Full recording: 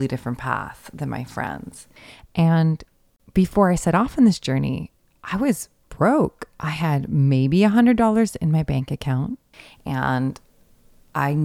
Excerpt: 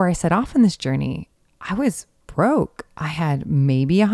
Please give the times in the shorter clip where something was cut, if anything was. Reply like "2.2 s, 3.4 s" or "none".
none